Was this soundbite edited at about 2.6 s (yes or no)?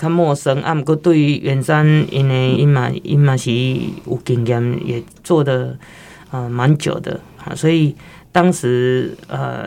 yes